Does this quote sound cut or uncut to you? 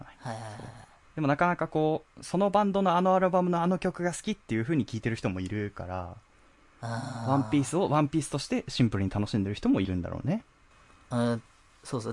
uncut